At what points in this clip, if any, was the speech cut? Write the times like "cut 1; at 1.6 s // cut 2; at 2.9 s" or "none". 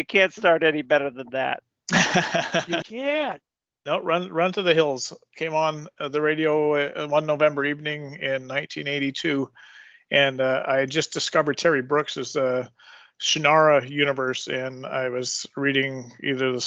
cut 1; at 2.8 s